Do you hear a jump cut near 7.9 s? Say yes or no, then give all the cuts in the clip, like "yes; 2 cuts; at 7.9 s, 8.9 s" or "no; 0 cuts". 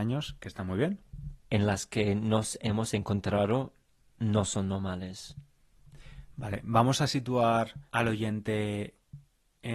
yes; 2 cuts; at 1.4 s, 7.9 s